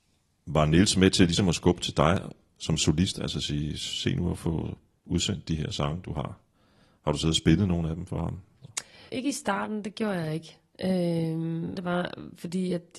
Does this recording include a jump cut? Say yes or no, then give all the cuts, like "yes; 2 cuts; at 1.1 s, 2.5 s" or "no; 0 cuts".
yes; 2 cuts; at 9.1 s, 11.8 s